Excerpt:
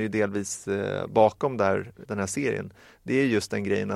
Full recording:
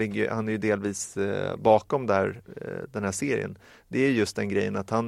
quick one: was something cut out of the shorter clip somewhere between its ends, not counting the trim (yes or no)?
yes